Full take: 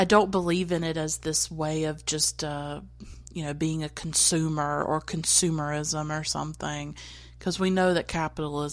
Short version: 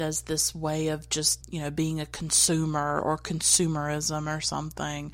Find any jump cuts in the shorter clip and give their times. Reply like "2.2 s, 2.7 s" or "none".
1.4 s